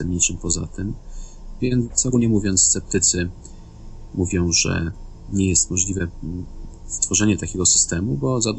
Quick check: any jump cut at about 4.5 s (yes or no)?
no